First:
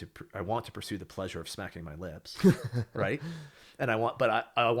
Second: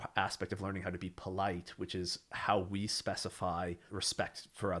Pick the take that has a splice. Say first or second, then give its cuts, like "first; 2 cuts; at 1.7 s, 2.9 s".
second; 1 cut; at 3.9 s